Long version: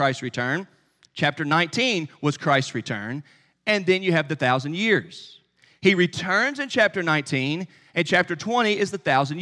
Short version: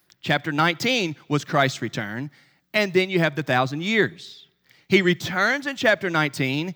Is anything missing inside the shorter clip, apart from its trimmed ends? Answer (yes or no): no